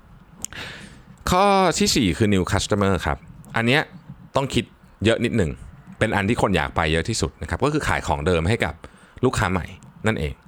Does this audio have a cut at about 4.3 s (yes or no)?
yes